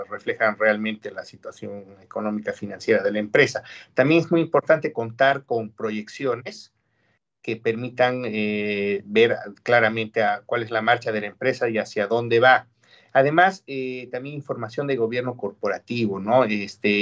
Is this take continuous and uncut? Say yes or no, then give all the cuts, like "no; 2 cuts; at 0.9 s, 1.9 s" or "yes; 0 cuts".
yes; 0 cuts